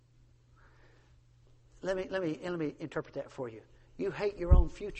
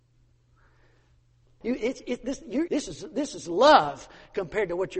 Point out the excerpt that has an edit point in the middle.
second; 2 cuts; at 1.6 s, 2.7 s

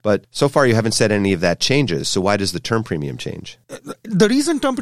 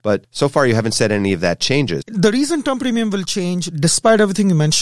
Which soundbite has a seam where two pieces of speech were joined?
second; 1 cut; at 2.0 s

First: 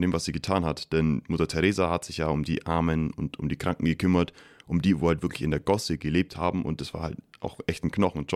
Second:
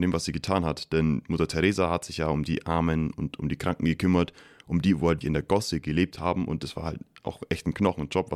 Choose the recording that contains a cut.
second; 1 cut; at 5.2 s

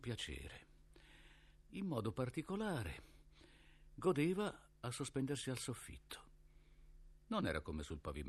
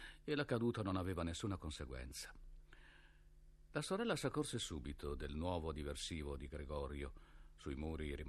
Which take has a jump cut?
first; 1 cut; at 1.6 s

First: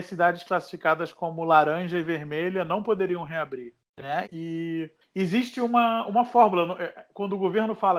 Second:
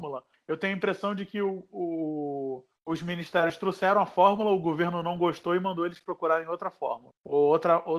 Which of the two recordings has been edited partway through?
first; 1 cut; at 4.2 s

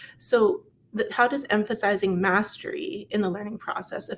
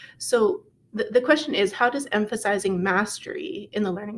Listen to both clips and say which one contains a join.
first; 1 cut; at 1.1 s

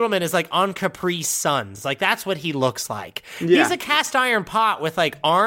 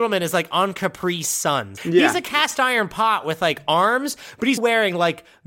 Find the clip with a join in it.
second; 2 cuts; at 1.8 s, 4.6 s

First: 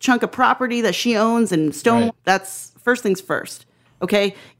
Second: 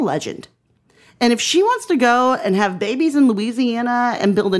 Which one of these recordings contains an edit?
first; 1 cut; at 2.1 s

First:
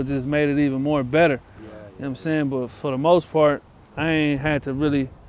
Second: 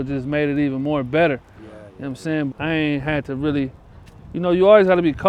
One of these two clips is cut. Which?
second; 1 cut; at 2.5 s

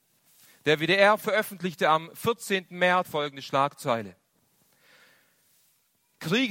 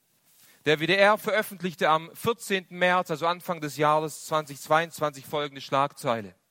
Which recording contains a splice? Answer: first; 1 cut; at 3.0 s

